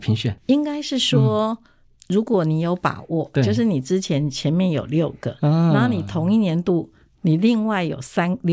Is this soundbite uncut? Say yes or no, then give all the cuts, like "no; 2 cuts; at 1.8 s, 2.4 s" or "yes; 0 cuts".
yes; 0 cuts